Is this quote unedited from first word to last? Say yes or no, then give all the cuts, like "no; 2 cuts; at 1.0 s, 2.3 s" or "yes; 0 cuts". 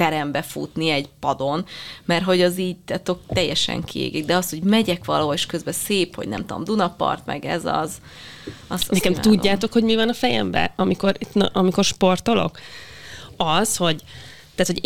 yes; 0 cuts